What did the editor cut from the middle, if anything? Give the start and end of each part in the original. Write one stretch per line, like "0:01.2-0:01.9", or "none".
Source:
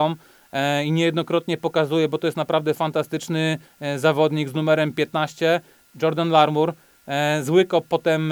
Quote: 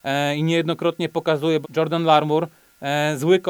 0:02.1-0:05.9